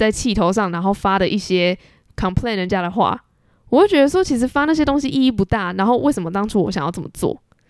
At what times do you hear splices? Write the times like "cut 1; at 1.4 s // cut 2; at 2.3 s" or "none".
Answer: none

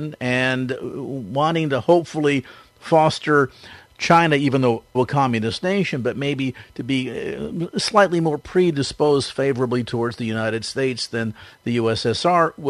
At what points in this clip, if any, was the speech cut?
cut 1; at 4.9 s

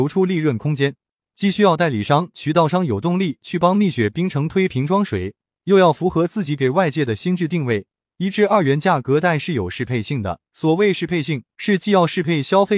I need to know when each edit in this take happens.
cut 1; at 10.5 s

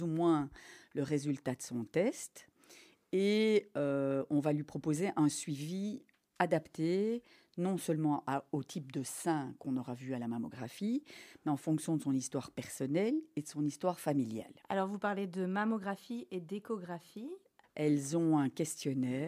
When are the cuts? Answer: cut 1; at 14.6 s // cut 2; at 17.6 s

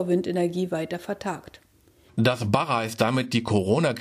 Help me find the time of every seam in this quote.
cut 1; at 2.1 s

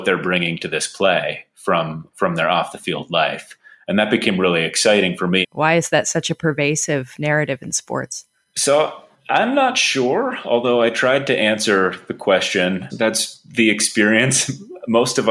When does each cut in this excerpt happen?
cut 1; at 5.4 s // cut 2; at 12.9 s

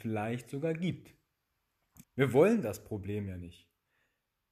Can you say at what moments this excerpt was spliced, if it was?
cut 1; at 2.0 s

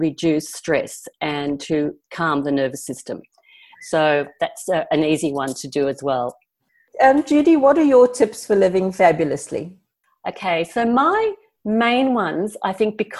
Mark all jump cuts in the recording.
cut 1; at 3.7 s

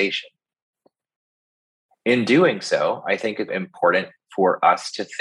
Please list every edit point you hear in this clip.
cut 1; at 3.5 s

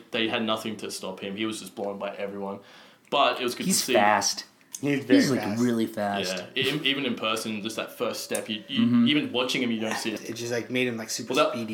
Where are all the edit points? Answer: cut 1; at 10.2 s

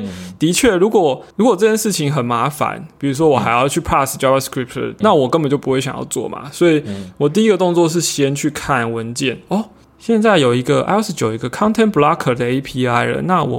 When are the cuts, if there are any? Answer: cut 1; at 1.3 s // cut 2; at 5.0 s

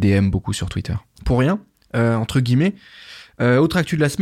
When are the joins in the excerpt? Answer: cut 1; at 1.2 s

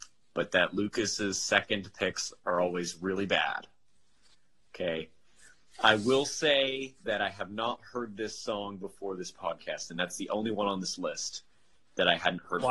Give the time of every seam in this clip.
none

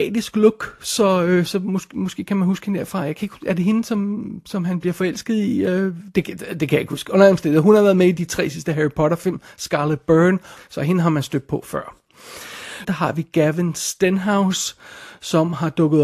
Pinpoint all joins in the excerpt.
cut 1; at 10.6 s // cut 2; at 12.8 s

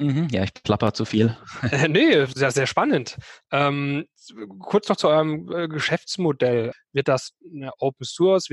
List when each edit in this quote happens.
cut 1; at 6.7 s

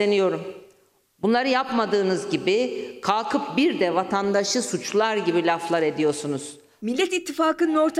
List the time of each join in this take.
cut 1; at 1.1 s // cut 2; at 6.8 s

